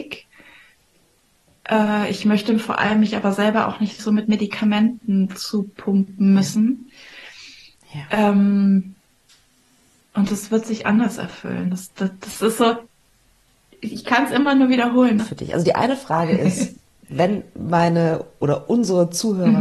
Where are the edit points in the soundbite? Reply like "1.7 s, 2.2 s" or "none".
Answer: 15.2 s